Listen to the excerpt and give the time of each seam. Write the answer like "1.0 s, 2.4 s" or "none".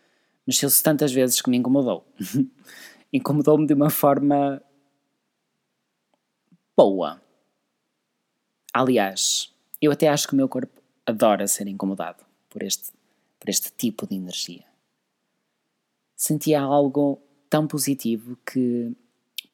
none